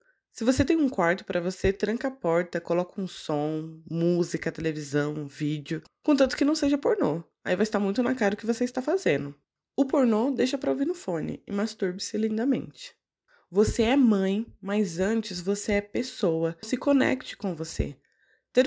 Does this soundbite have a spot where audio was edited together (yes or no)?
yes